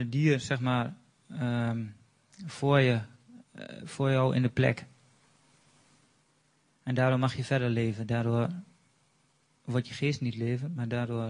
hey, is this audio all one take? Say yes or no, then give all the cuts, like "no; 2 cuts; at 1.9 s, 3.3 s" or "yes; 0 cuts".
yes; 0 cuts